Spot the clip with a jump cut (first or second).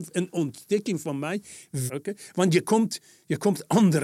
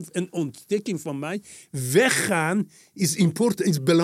first